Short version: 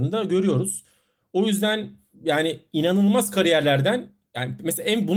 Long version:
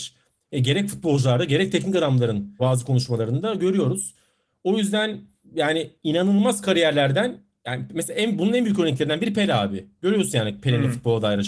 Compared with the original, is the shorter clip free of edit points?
yes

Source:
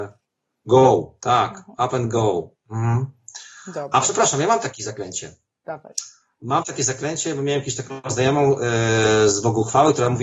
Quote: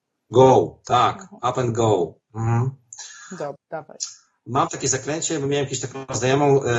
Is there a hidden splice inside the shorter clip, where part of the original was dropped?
yes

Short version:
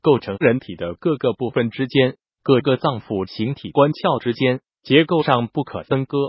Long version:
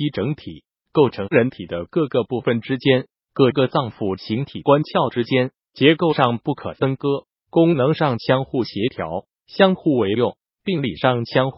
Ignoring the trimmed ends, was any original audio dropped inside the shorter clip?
no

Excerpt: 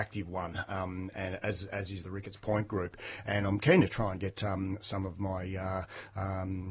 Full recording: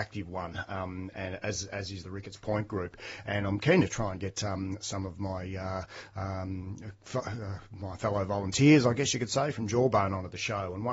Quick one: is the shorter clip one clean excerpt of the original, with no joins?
yes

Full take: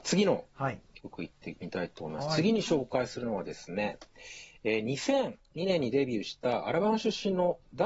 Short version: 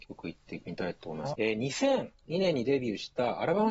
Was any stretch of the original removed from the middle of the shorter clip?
yes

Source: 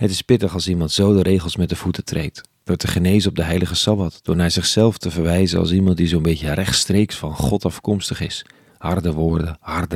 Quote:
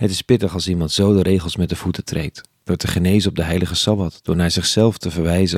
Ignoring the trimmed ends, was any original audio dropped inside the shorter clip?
no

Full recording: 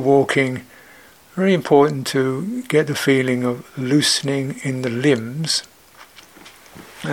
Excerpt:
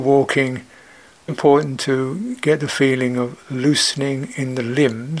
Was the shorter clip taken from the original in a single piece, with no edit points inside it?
no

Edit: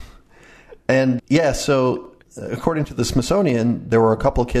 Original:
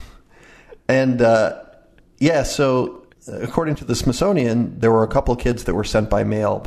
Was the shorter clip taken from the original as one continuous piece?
no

